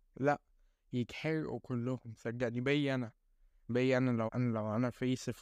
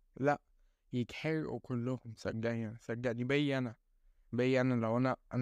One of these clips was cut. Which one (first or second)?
first